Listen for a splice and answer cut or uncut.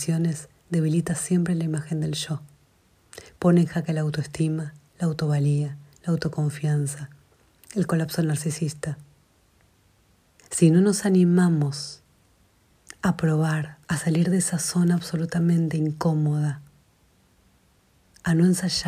cut